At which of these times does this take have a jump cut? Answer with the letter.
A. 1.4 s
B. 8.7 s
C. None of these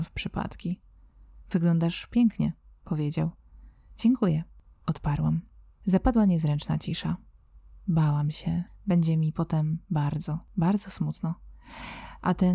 B